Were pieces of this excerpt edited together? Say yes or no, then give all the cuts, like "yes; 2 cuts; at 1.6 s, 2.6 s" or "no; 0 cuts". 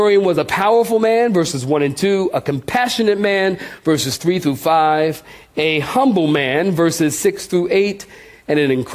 no; 0 cuts